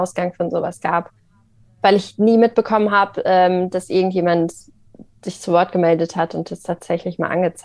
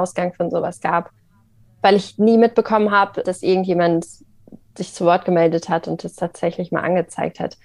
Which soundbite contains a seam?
second; 1 cut; at 3.2 s

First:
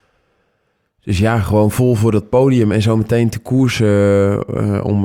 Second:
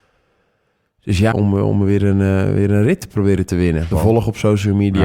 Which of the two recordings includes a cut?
second; 2 cuts; at 1.3 s, 3.9 s

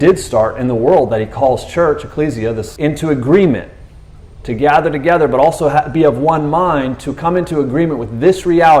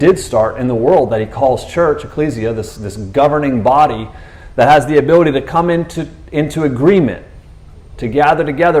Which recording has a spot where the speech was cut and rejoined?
first; 1 cut; at 2.8 s

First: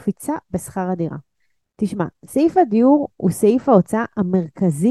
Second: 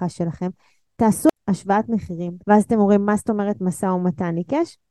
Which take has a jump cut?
second; 1 cut; at 2.4 s

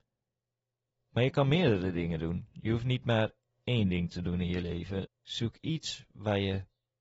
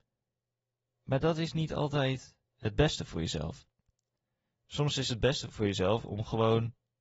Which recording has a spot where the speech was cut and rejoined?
first; 2 cuts; at 0.9 s, 5.1 s

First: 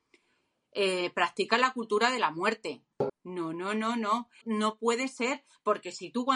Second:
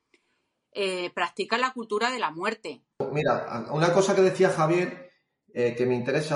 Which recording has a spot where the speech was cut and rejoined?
first; 2 cuts; at 3.1 s, 4.4 s

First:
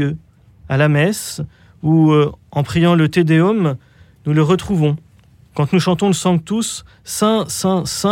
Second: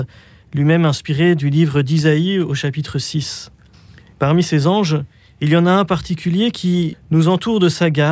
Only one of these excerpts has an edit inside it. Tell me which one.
second; 2 cuts; at 4.1 s, 6.9 s

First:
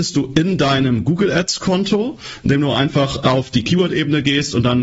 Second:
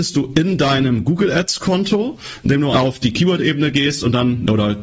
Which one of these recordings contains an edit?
second; 1 cut; at 2.7 s

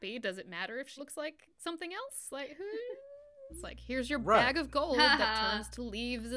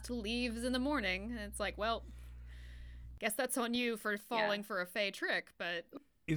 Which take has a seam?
first; 2 cuts; at 1.0 s, 3.5 s

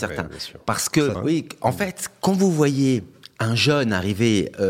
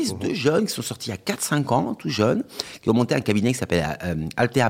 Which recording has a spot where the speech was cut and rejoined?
first; 1 cut; at 1.1 s

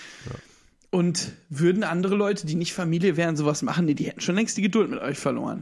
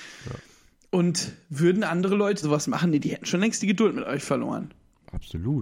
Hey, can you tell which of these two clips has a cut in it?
second; 1 cut; at 2.4 s

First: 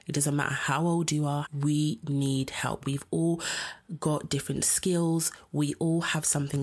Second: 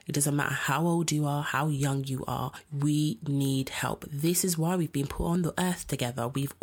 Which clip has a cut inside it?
first; 2 cuts; at 1.4 s, 2.8 s

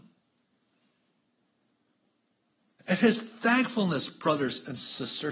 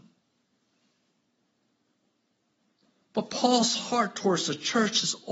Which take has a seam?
first; 1 cut; at 2.8 s

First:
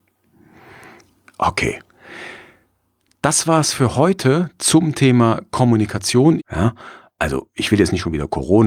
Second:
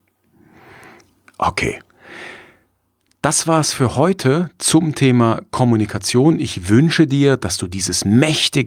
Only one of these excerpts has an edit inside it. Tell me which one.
first; 1 cut; at 6.4 s

